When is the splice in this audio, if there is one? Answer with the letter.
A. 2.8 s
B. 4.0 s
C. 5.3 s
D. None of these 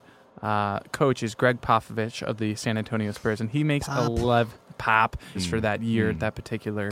C